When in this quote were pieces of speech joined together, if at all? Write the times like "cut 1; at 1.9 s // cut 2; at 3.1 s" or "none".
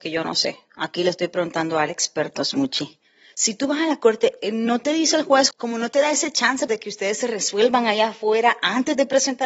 cut 1; at 5.5 s // cut 2; at 6.7 s